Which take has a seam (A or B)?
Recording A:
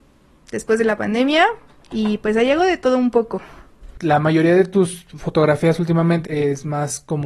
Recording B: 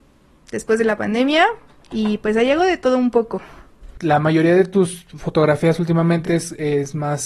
A